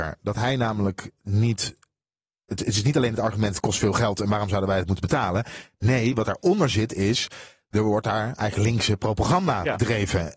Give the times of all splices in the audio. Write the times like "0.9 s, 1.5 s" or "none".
none

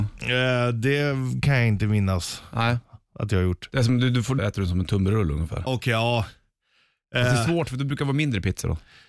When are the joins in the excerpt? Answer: 4.4 s, 5.7 s

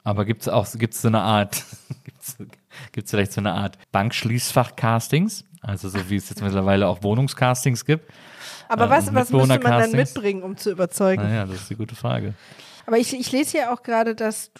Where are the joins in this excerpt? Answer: 3.8 s, 12.8 s

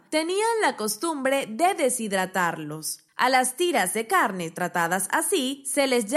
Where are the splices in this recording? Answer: none

